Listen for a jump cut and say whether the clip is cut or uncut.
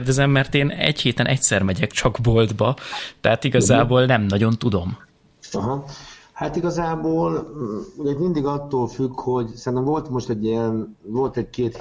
uncut